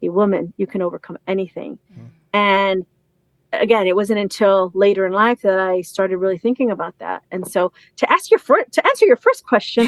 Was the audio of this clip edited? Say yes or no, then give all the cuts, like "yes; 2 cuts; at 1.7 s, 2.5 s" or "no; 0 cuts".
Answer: no; 0 cuts